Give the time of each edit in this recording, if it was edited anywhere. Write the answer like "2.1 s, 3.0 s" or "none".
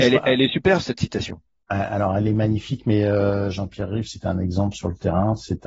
none